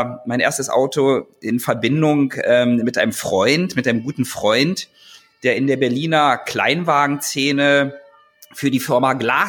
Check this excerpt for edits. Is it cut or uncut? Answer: uncut